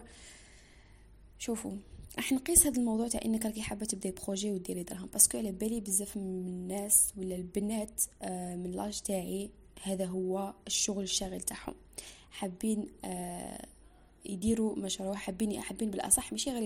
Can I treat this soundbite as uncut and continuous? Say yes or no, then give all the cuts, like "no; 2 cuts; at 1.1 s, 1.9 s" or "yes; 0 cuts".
yes; 0 cuts